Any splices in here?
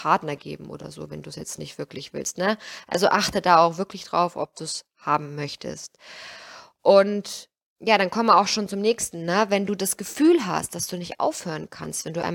no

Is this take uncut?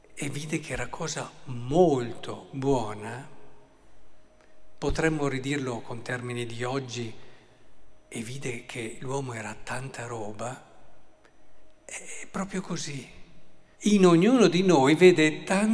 no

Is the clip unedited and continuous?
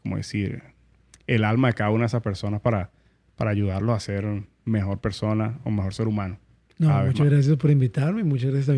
yes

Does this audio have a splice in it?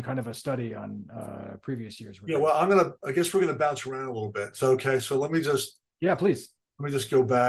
no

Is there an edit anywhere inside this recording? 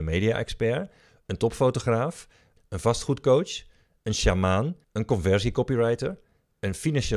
yes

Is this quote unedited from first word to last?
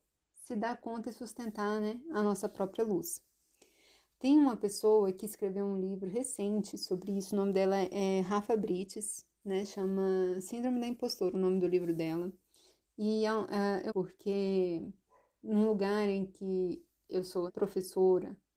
no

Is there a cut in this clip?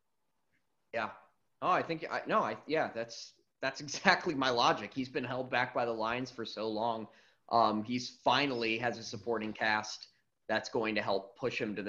no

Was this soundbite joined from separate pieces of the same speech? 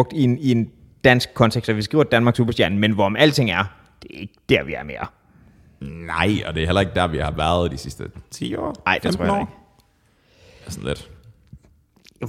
no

